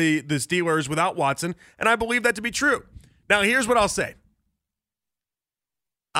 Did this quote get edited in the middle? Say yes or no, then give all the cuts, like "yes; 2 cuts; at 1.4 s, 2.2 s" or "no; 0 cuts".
no; 0 cuts